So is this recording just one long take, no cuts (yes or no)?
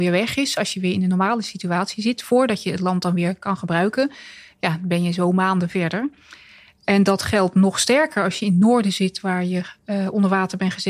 yes